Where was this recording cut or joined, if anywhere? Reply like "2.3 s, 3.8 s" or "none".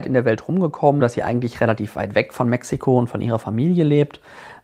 1.0 s